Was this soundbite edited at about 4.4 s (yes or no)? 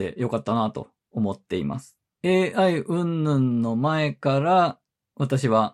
no